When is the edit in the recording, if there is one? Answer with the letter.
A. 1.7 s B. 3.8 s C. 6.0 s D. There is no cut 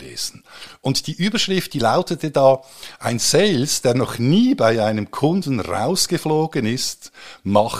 D